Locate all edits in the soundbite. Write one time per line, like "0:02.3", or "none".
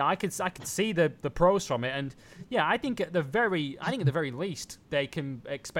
0:04.8